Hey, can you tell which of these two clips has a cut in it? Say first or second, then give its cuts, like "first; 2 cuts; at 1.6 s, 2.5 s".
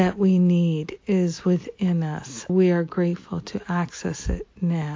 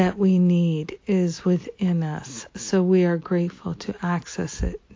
first; 1 cut; at 2.5 s